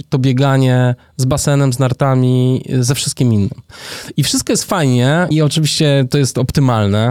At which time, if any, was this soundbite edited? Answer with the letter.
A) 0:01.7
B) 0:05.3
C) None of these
B